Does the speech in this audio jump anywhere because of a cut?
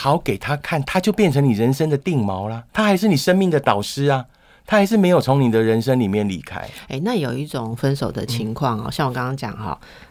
yes; 1 cut; at 2.7 s

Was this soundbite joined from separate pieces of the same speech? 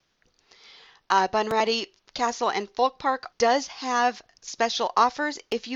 yes; 1 cut; at 3.3 s

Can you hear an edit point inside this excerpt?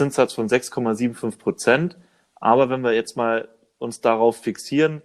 no; 0 cuts

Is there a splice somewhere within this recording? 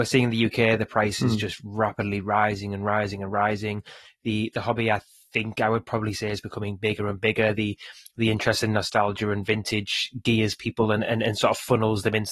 no; 0 cuts

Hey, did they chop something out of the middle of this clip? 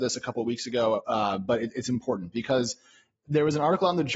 no; 0 cuts

